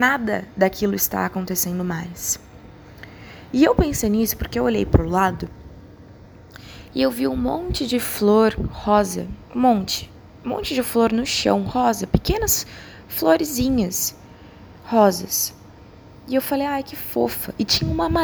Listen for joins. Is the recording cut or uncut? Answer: cut